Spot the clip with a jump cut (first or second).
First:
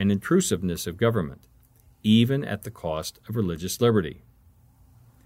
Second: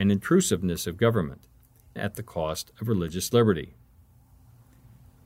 second